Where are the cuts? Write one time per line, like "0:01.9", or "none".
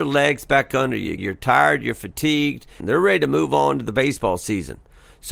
0:01.2
0:02.8